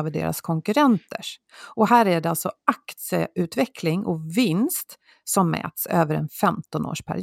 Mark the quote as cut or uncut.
uncut